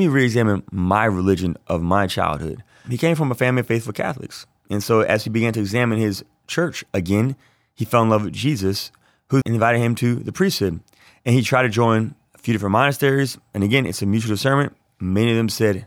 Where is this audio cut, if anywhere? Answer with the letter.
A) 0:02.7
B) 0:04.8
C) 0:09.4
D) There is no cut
C